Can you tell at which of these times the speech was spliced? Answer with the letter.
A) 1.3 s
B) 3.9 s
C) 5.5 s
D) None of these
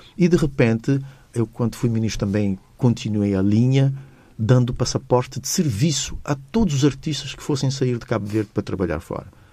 A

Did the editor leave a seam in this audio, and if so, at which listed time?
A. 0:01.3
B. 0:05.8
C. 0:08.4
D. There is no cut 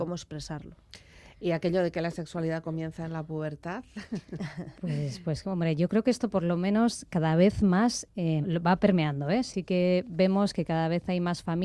C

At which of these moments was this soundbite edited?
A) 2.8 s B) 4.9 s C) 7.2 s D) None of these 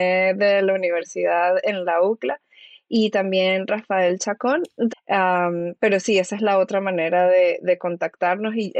B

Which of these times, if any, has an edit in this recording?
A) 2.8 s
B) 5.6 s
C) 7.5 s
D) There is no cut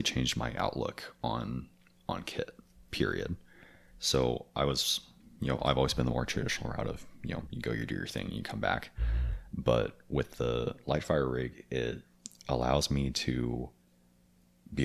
C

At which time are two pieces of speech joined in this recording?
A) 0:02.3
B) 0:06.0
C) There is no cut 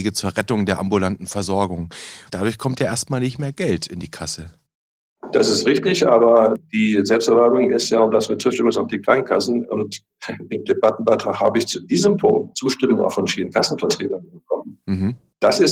A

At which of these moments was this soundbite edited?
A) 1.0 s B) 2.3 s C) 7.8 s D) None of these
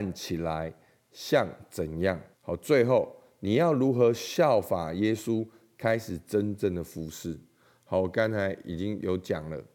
B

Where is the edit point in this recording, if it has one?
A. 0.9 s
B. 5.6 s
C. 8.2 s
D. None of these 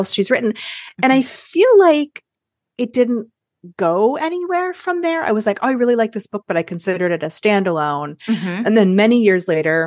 D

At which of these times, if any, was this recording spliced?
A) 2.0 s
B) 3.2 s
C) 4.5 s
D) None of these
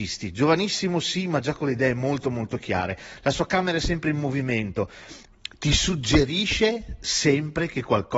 D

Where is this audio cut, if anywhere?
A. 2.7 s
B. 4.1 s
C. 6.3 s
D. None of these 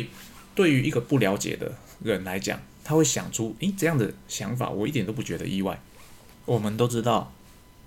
C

